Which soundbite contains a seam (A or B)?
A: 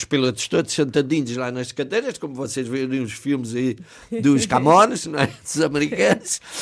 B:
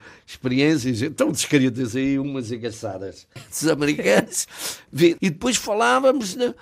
B